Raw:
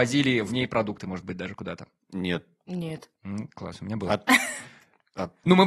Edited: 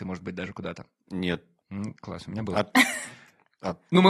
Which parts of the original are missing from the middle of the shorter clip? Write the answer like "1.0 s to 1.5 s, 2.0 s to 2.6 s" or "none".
2.6 s to 3.1 s

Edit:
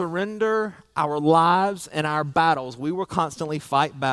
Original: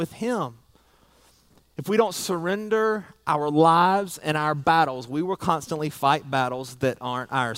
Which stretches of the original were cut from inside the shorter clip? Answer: none

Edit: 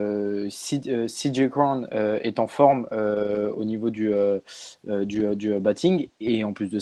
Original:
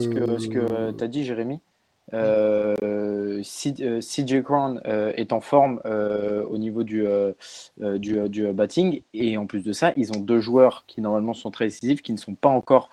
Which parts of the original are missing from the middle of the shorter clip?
none

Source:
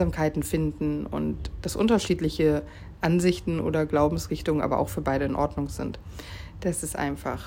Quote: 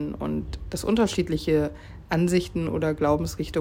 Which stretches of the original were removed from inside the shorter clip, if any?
none

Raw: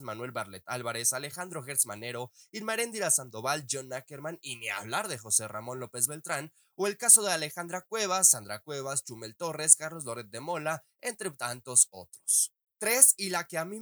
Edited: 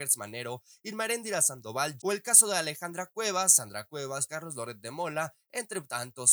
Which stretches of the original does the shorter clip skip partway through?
3.7 s to 6.7 s, 9.0 s to 9.8 s

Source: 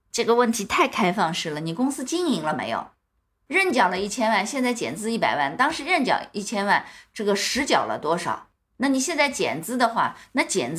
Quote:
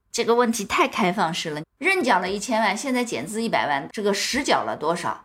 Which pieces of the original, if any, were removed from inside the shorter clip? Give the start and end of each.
1.6 s to 3.3 s, 5.6 s to 7.1 s

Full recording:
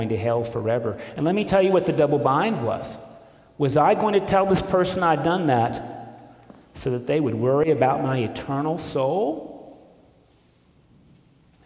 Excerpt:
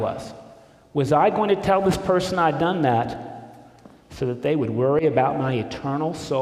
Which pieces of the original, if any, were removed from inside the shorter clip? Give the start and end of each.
none

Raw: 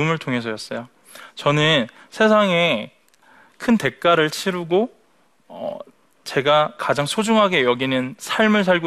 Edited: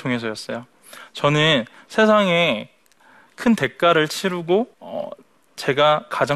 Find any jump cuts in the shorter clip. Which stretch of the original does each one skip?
5.0 s to 5.4 s

